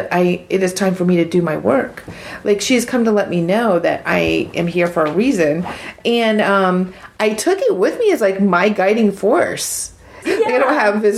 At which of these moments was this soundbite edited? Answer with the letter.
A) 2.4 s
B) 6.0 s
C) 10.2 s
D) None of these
C